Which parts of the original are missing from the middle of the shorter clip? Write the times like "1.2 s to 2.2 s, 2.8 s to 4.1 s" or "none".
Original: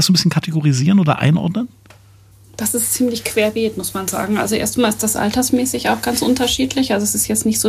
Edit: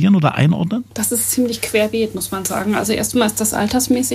1.7 s to 2.5 s

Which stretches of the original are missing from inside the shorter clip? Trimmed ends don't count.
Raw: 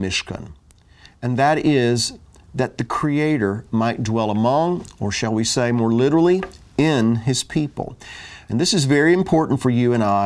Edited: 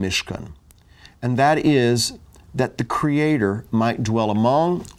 none

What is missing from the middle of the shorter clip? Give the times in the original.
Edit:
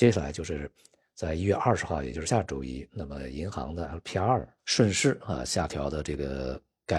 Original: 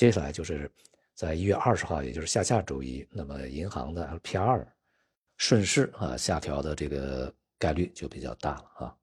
2.3 s to 2.4 s, 4.8 s to 5.3 s

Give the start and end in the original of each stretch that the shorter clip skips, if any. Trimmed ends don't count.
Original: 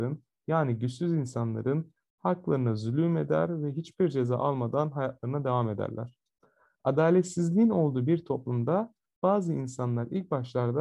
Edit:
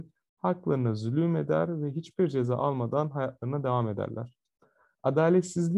none

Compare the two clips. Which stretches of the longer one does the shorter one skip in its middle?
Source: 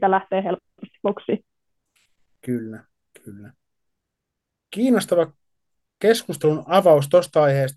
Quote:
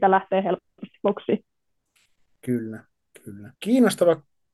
3.5 s to 4.7 s

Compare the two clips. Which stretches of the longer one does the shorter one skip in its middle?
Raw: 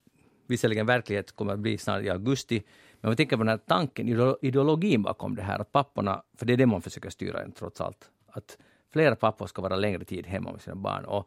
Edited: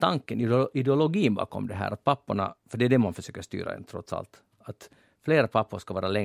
none

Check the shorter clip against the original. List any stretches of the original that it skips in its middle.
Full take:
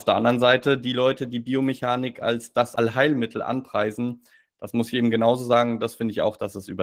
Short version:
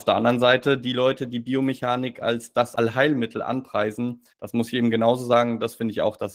4.3 s to 4.5 s

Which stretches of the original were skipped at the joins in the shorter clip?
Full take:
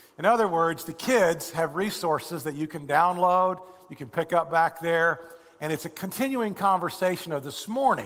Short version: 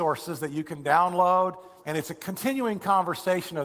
3.8 s to 5.6 s

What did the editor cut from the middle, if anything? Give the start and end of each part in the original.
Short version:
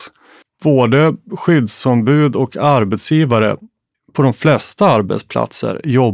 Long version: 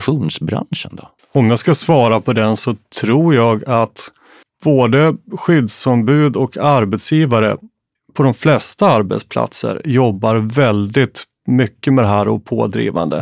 none

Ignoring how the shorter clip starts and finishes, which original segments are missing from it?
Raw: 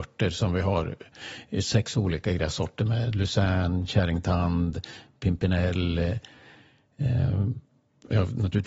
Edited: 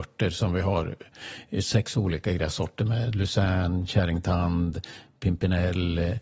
none

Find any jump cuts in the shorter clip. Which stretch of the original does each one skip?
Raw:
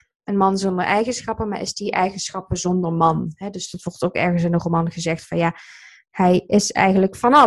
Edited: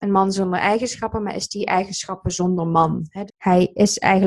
3.5 s to 6.0 s

